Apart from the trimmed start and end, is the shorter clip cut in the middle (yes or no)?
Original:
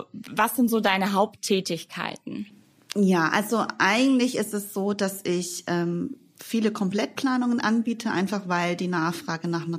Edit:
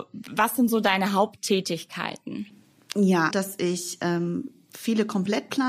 yes